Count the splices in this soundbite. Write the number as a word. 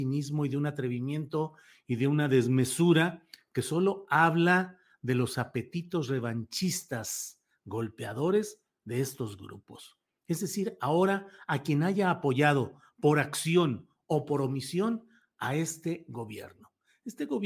zero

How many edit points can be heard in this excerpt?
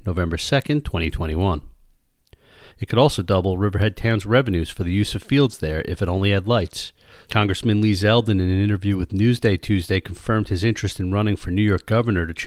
two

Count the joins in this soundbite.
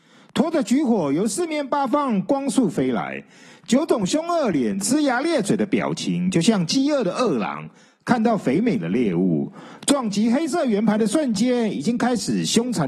zero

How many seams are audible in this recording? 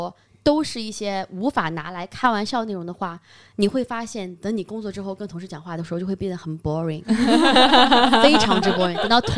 zero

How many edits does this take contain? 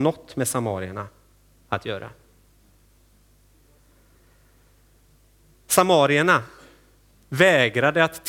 zero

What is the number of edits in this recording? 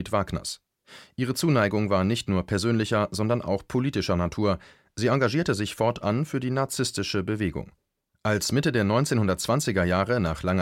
zero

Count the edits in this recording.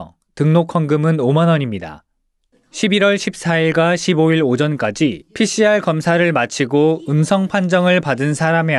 one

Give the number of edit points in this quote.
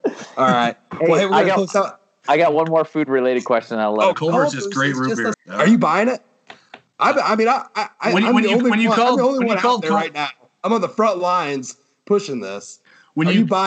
two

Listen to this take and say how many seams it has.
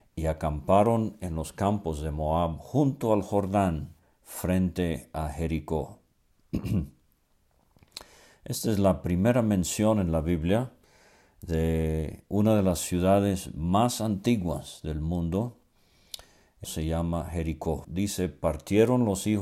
two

